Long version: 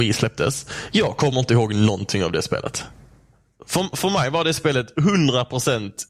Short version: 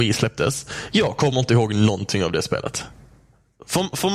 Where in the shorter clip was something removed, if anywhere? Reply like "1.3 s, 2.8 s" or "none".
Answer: none